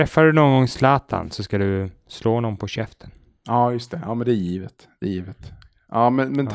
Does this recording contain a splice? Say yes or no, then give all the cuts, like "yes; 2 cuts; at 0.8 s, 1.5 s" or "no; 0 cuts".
no; 0 cuts